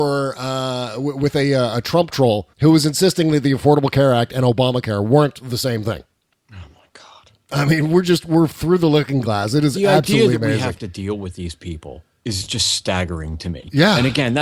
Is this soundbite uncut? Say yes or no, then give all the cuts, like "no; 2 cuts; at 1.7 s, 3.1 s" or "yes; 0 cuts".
no; 1 cut; at 2.5 s